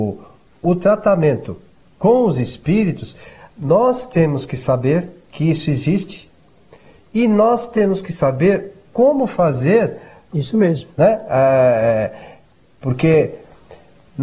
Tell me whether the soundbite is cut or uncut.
cut